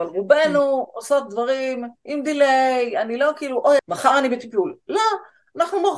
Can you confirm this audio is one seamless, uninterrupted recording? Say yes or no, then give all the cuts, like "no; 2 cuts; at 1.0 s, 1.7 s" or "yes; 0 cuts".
no; 2 cuts; at 2.0 s, 3.8 s